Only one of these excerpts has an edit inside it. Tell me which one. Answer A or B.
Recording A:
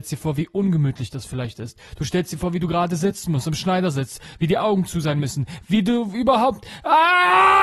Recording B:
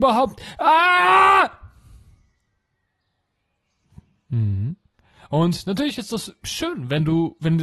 A